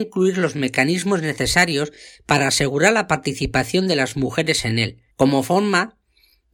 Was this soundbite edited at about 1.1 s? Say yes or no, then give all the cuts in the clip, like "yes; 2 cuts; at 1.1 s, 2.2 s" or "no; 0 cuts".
no; 1 cut; at 5.1 s